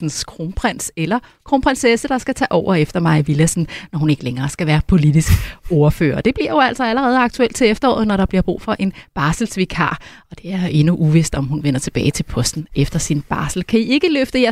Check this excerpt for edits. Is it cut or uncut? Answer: uncut